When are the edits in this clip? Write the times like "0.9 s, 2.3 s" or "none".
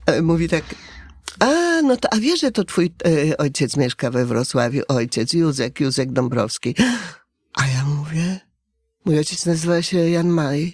none